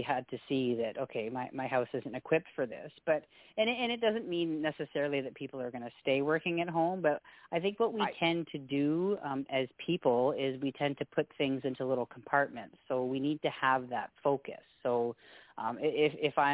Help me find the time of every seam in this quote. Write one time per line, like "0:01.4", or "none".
none